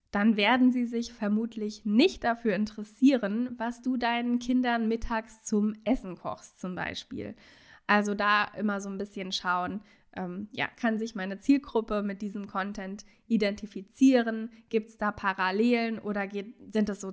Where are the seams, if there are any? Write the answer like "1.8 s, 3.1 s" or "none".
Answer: none